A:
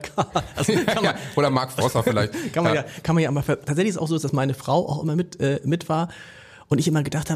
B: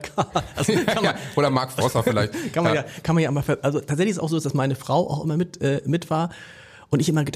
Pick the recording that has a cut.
A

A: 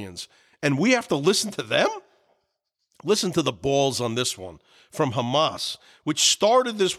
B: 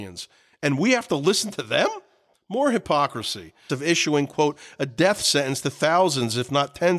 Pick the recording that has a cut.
B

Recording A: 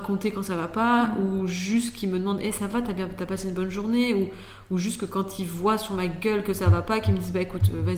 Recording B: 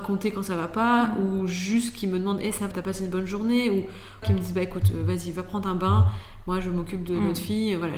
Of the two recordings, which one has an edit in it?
B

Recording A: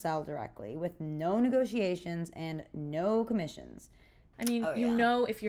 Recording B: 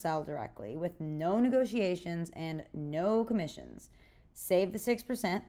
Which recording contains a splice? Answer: A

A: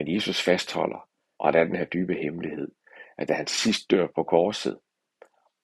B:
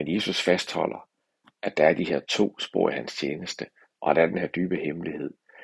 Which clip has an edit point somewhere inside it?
A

